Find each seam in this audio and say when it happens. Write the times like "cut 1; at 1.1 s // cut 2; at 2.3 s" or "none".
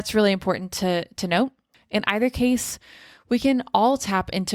cut 1; at 1.7 s